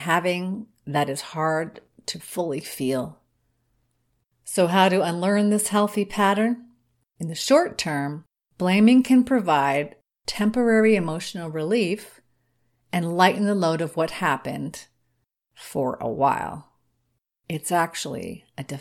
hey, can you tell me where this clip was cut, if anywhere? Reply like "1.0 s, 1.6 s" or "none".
4.2 s, 7.2 s